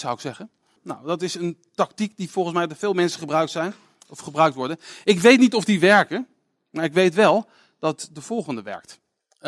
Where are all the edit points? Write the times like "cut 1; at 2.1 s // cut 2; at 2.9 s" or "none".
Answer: none